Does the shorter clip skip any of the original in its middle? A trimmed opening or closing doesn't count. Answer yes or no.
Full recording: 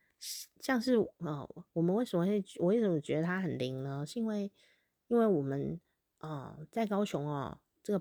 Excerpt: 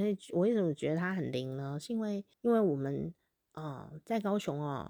yes